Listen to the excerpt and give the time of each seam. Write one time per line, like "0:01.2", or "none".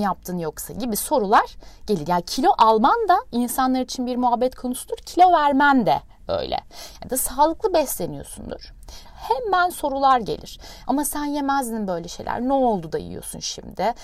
0:09.0
0:10.8